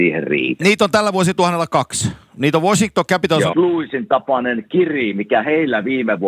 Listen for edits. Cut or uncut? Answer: cut